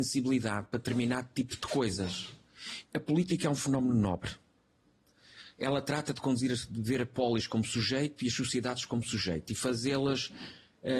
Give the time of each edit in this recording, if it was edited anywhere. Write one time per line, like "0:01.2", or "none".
0:02.8